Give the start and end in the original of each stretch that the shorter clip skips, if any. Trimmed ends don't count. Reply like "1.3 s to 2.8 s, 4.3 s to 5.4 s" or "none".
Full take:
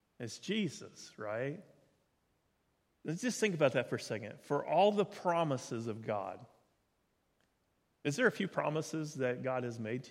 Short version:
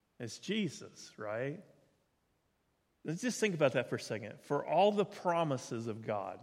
none